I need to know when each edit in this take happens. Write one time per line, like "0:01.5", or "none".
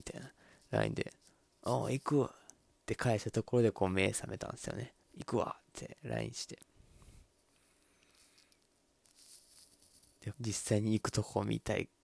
0:05.0
0:10.3